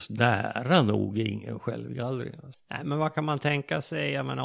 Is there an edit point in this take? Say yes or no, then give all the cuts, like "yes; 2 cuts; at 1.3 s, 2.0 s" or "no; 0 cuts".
yes; 1 cut; at 2.5 s